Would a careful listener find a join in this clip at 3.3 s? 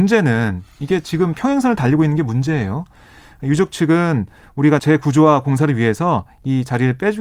no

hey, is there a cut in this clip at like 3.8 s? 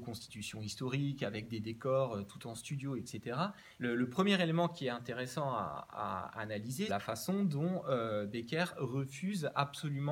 yes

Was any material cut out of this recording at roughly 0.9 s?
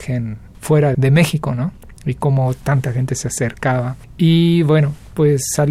yes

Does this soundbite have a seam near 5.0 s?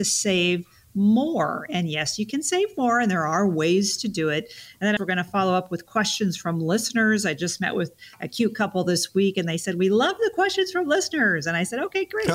yes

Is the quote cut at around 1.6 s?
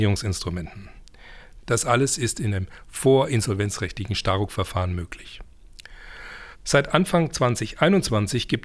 yes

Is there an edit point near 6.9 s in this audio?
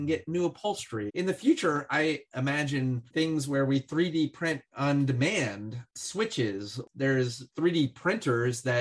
no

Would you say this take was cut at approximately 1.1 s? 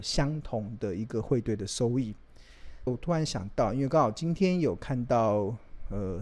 no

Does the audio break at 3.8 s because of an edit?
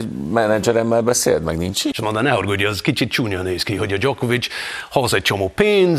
no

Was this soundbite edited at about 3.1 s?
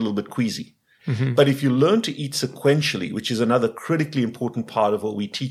no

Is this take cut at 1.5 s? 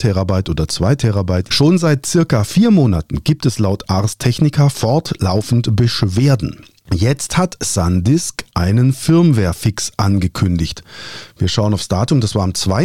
yes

